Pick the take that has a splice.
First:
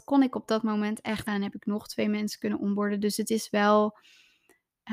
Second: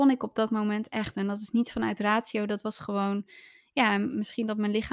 first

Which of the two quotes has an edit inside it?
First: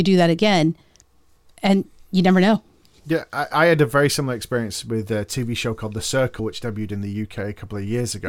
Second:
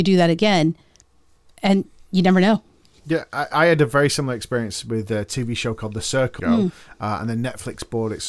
second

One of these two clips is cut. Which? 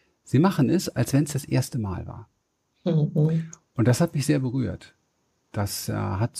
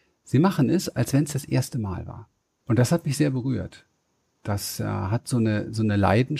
second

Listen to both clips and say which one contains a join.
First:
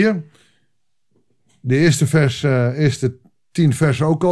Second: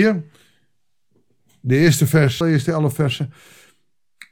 second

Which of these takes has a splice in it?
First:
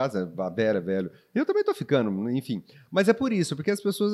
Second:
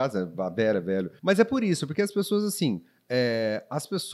second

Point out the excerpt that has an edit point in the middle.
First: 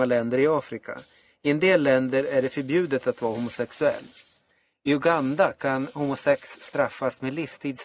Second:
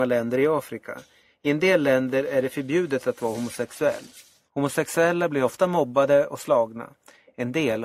second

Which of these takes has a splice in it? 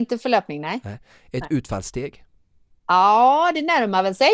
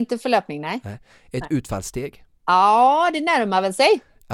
second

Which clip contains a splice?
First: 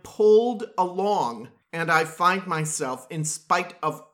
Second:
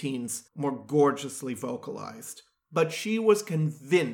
second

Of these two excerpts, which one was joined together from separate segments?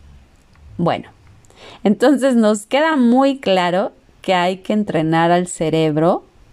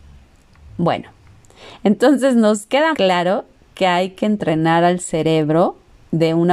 second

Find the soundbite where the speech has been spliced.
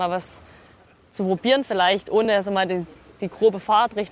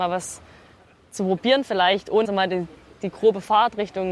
second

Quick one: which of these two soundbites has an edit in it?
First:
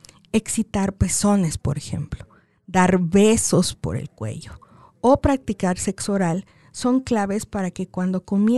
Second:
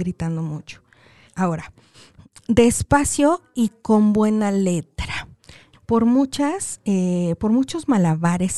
second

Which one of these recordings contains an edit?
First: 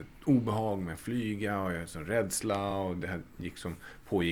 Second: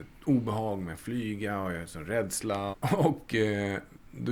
second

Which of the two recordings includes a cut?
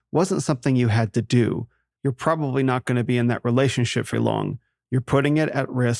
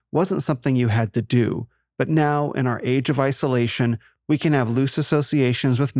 first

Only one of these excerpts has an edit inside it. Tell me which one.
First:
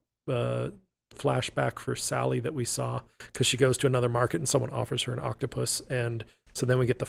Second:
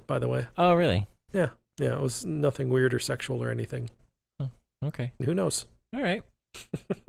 second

